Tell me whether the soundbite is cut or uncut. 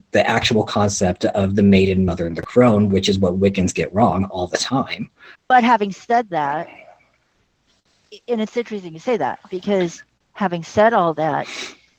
cut